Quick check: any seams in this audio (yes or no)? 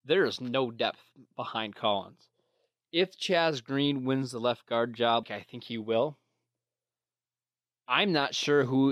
yes